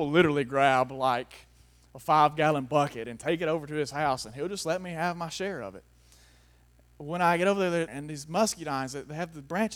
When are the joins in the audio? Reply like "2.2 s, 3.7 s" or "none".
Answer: 7.9 s